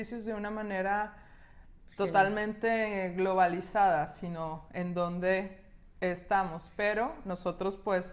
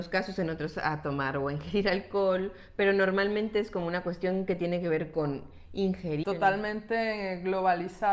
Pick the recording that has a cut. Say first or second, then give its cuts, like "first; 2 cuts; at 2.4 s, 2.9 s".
second; 1 cut; at 6.2 s